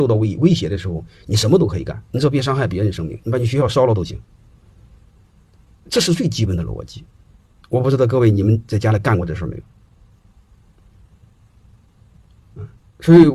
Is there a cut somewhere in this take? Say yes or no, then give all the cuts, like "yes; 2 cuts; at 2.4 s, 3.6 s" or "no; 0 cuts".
yes; 1 cut; at 2.1 s